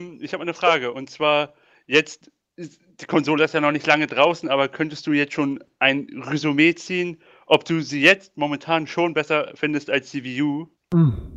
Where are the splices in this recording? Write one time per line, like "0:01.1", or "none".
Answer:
none